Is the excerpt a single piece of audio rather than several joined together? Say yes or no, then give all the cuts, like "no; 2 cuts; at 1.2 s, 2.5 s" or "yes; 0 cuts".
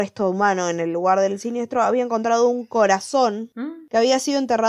yes; 0 cuts